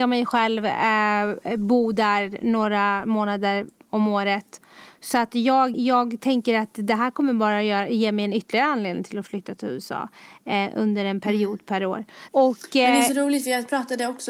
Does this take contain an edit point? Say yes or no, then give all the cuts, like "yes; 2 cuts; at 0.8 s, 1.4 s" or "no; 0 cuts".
yes; 2 cuts; at 5.7 s, 12.3 s